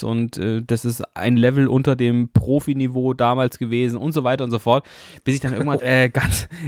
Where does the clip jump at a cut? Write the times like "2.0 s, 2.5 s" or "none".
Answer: 5.8 s